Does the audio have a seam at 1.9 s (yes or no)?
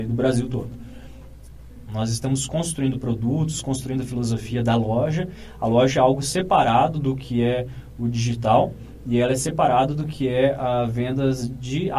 yes